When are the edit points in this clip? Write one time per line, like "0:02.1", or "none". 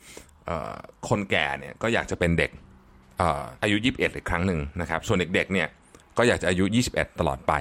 0:03.6